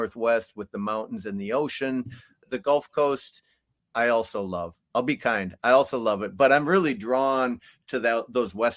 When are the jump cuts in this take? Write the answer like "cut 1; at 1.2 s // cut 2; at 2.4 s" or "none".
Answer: none